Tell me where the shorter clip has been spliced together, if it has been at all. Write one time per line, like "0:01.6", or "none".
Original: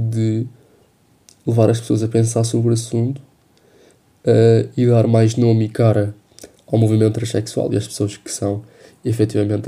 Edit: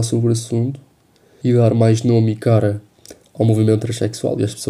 0:01.4